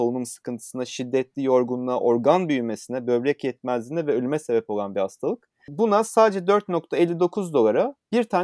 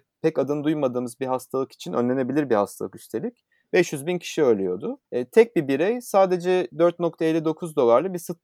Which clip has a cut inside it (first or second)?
second